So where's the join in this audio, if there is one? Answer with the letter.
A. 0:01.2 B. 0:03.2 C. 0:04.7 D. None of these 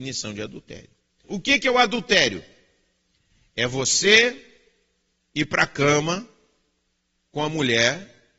A